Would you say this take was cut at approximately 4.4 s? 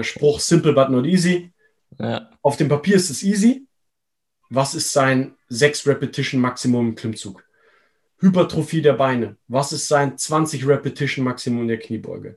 yes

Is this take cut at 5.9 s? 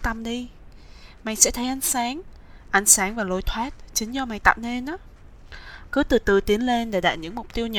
yes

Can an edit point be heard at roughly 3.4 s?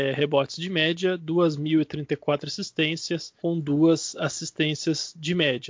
yes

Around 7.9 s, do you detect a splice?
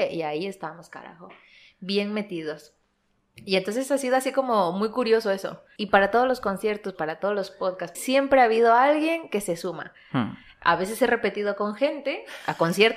yes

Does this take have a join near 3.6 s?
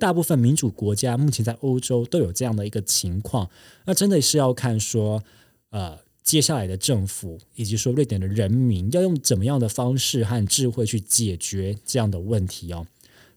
no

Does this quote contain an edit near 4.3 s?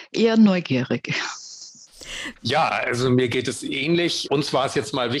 no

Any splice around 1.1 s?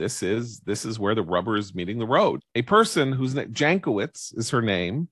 no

